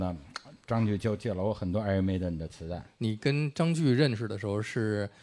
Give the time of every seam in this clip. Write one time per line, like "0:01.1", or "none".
none